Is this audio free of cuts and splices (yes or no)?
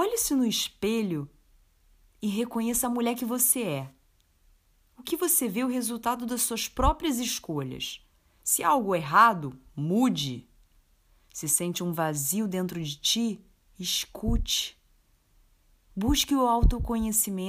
yes